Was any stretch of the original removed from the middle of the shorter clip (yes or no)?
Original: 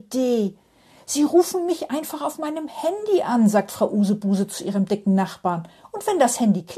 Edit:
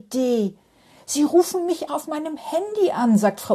yes